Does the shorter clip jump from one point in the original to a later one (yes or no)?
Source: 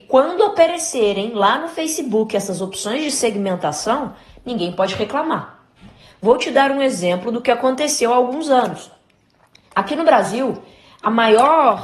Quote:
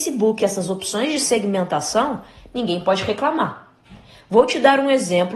no